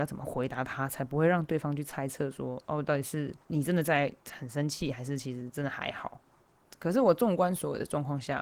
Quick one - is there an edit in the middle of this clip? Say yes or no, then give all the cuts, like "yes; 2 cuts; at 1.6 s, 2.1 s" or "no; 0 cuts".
yes; 1 cut; at 3.4 s